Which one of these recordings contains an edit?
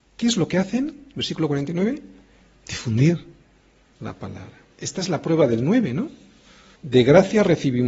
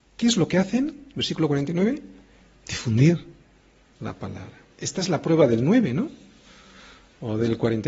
first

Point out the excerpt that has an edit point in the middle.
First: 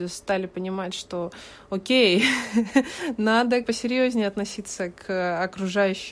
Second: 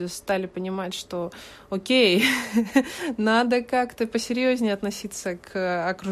first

